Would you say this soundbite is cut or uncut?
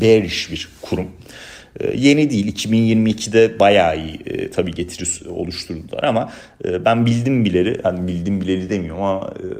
uncut